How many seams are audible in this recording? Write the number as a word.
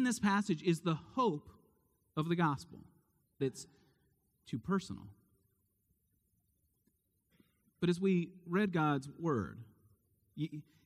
one